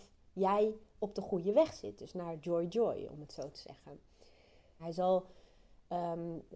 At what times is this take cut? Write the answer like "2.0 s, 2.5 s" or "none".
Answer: 4.8 s